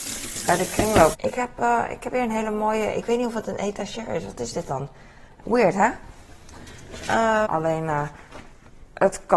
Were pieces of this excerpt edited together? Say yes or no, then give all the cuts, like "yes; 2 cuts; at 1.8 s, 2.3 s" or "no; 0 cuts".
yes; 3 cuts; at 1.1 s, 5.4 s, 7.4 s